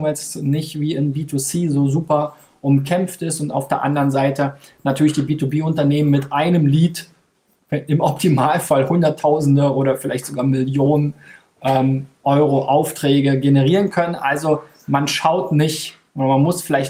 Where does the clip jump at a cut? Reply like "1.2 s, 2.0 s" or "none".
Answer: none